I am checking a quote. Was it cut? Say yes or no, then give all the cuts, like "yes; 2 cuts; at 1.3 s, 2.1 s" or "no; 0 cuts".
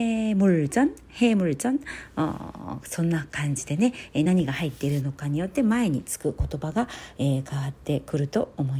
no; 0 cuts